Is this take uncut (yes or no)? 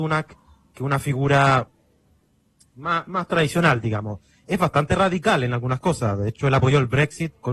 yes